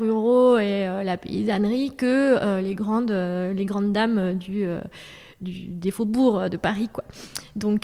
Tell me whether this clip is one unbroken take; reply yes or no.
yes